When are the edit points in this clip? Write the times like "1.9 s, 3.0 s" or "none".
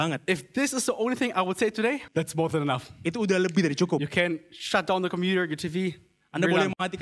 2.1 s